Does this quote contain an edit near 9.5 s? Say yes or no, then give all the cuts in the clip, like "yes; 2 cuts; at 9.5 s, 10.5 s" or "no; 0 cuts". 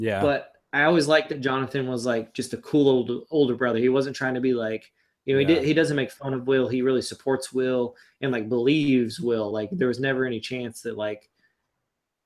no; 0 cuts